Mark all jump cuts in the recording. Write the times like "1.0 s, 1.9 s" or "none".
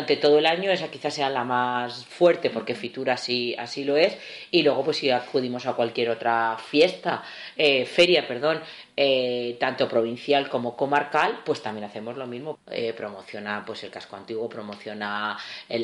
12.6 s